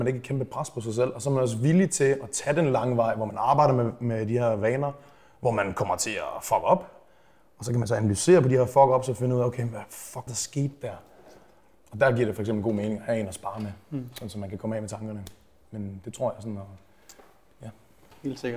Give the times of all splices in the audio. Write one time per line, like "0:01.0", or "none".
0:10.3